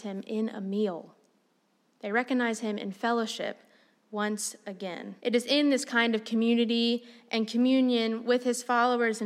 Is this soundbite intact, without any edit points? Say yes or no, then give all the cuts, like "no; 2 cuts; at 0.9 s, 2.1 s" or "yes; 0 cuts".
no; 1 cut; at 5.2 s